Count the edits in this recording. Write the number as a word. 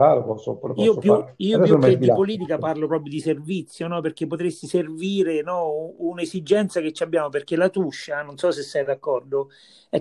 zero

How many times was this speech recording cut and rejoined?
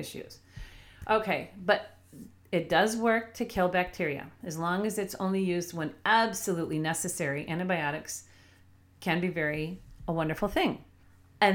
zero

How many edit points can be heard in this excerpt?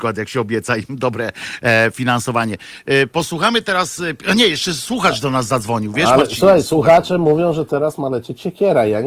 zero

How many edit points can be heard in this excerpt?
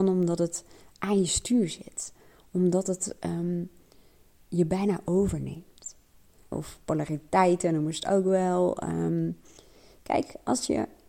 one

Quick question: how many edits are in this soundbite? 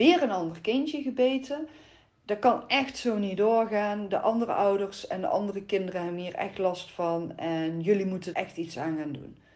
one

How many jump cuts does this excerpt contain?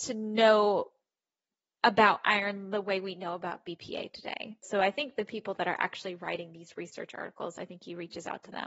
one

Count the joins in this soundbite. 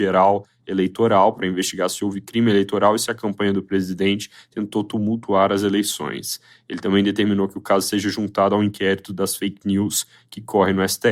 zero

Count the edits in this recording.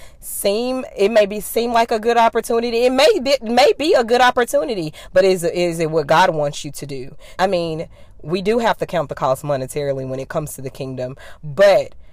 one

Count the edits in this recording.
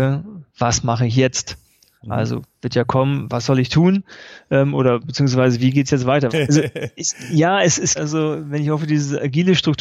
two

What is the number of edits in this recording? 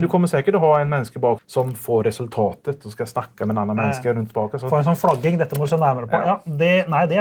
one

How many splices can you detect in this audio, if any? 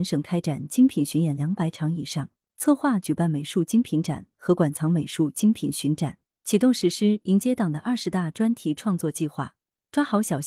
one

